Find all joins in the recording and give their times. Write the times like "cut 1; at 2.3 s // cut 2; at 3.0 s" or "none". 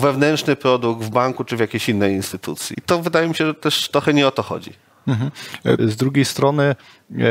cut 1; at 2.7 s // cut 2; at 5.8 s